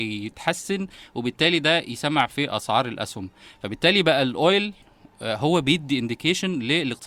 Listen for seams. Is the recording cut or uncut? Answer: uncut